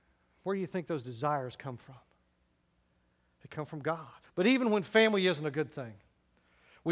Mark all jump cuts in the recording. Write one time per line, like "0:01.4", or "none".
0:04.2